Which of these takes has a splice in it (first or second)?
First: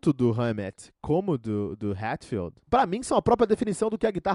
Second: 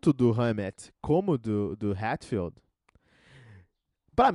first